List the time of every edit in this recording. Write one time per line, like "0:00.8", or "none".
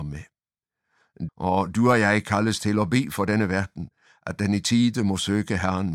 0:01.3